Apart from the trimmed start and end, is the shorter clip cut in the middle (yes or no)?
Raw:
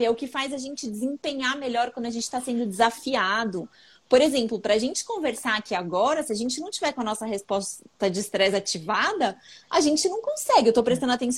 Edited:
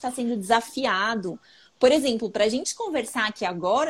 no